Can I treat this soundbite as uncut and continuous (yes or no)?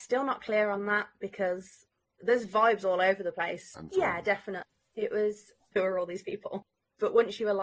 no